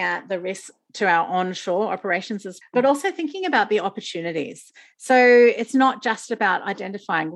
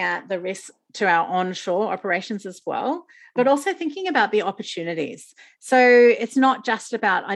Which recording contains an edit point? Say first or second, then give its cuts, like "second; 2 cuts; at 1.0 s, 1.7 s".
first; 1 cut; at 2.6 s